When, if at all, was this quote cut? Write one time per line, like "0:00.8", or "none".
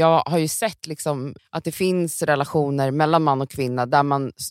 0:01.4

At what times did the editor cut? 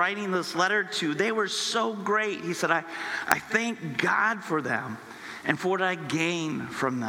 none

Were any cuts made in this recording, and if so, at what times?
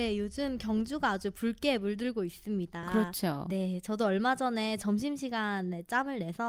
none

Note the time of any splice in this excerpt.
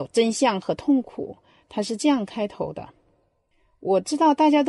0:01.6

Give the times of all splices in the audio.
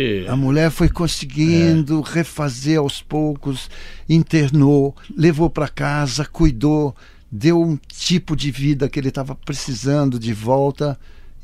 0:05.0

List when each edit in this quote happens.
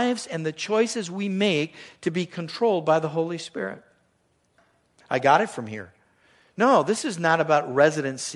0:05.0

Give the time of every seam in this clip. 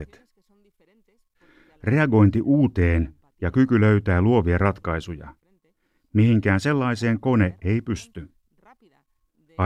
none

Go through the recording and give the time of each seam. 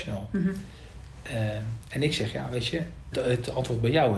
0:03.1

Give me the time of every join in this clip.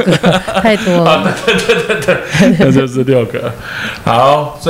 none

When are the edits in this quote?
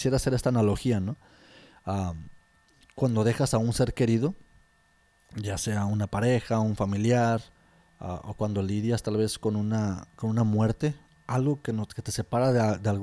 none

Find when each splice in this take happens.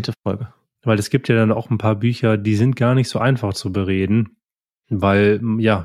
none

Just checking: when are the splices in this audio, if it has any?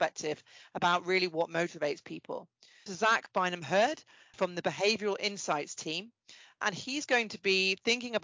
0:02.9

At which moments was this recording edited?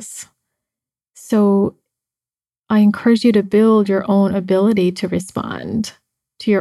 none

